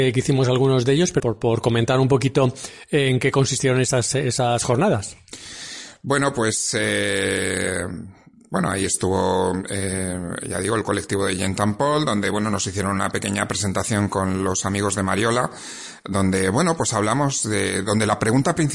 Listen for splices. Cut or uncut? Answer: cut